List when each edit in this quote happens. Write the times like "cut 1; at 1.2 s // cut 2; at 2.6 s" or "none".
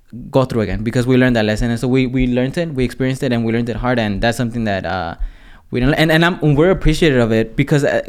none